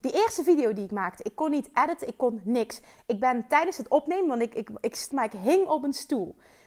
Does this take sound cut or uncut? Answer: cut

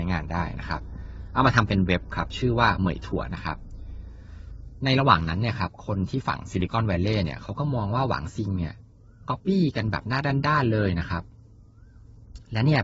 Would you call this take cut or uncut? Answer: cut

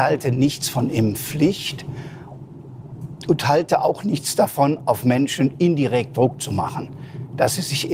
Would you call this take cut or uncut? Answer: uncut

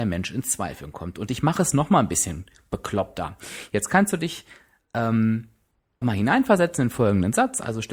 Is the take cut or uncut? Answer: cut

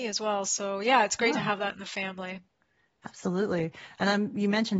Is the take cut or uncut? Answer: uncut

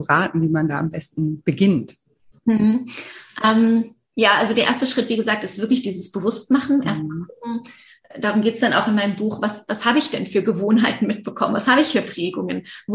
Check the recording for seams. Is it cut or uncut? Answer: uncut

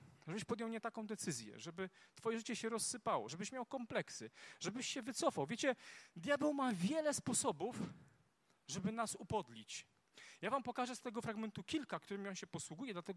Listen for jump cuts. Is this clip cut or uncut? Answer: cut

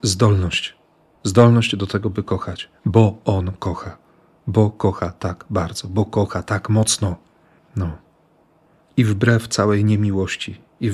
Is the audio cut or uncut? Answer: uncut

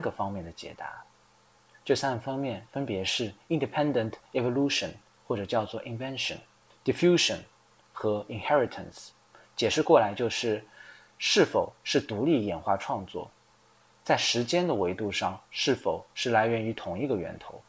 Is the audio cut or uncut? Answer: uncut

